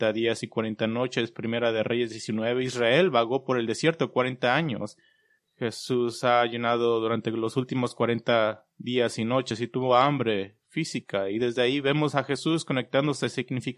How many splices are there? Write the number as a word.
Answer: one